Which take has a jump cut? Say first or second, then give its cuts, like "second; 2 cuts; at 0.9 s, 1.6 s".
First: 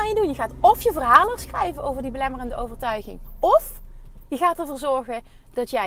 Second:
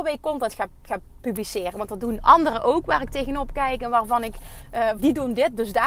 second; 2 cuts; at 1.2 s, 5.0 s